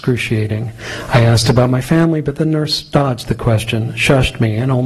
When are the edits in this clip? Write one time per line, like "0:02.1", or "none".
none